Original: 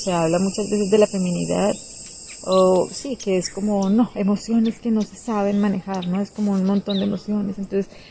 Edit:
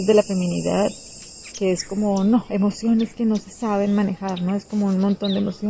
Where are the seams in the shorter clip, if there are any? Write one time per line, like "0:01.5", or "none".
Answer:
0:01.5